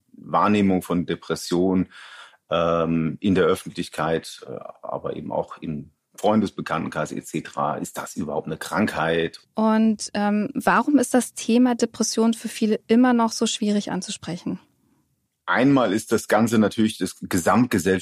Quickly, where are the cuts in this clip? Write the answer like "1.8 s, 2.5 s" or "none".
9.4 s